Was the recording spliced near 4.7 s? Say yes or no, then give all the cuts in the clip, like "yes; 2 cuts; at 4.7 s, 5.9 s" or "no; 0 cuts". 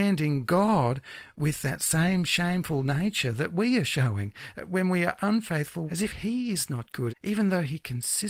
no; 2 cuts; at 5.9 s, 7.1 s